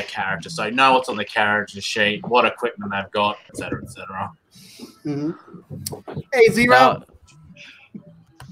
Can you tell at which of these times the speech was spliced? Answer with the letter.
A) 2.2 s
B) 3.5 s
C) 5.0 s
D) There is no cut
B